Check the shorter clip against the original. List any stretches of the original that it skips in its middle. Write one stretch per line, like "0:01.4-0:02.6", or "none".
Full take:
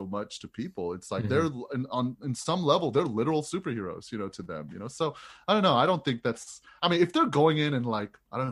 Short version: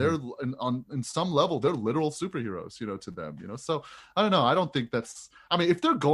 none